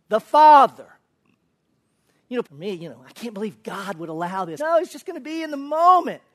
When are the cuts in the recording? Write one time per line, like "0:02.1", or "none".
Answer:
0:02.4
0:04.6